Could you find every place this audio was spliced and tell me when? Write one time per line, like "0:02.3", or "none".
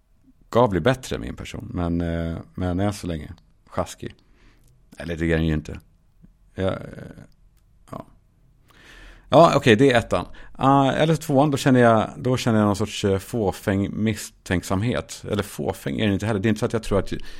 none